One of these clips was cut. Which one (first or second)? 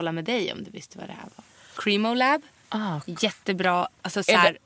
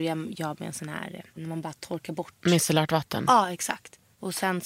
second